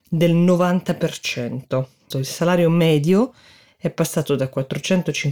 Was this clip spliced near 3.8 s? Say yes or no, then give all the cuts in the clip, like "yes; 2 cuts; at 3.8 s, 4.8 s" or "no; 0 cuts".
no; 1 cut; at 2.1 s